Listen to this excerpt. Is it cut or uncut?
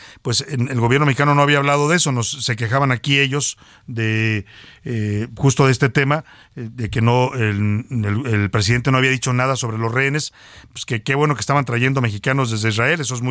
uncut